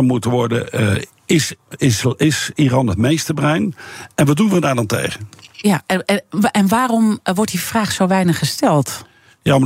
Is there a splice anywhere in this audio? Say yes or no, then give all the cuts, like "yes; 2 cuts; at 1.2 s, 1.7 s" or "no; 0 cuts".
no; 0 cuts